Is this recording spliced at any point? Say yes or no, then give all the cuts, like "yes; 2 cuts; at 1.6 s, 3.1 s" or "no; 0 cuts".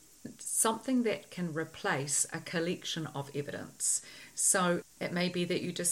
yes; 1 cut; at 4.8 s